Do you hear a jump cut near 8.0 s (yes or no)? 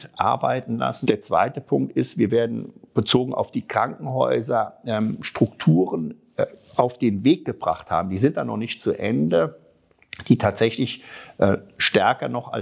no